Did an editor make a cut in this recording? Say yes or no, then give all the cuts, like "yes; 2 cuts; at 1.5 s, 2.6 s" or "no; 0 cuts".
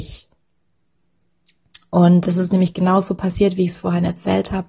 yes; 1 cut; at 2.2 s